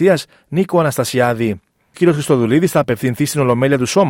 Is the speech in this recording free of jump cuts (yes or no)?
no